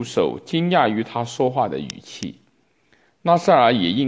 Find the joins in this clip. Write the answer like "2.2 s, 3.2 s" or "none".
none